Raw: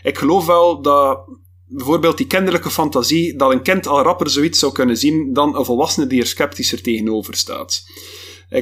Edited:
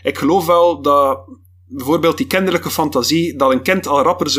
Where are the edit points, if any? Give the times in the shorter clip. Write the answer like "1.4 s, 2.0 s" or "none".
none